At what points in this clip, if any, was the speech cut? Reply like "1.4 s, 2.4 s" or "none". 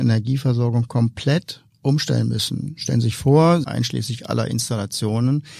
3.6 s